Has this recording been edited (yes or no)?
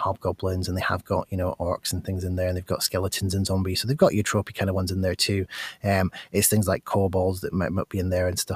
no